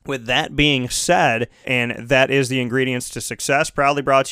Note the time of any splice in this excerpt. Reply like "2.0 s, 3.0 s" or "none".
1.6 s